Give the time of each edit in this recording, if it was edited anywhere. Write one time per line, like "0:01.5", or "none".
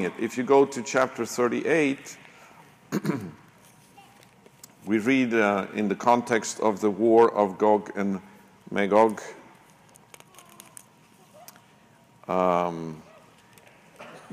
none